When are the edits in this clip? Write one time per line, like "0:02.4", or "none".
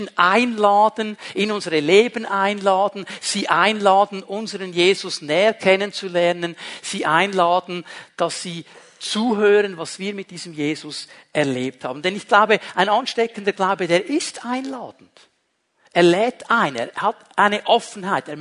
none